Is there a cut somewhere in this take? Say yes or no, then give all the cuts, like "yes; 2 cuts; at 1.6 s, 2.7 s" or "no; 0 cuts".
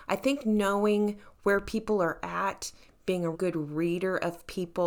yes; 1 cut; at 3.3 s